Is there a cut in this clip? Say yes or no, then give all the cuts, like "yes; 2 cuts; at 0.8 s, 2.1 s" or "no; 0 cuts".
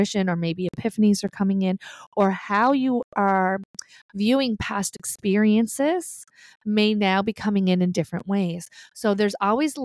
no; 0 cuts